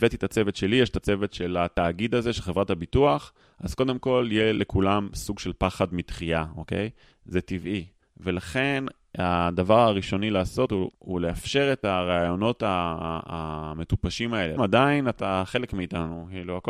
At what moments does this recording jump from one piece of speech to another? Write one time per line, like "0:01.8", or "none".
0:10.9
0:14.6